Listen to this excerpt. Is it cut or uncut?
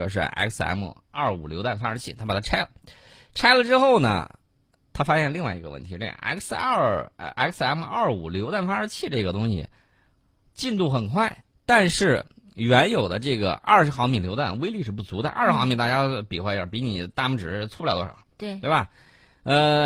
uncut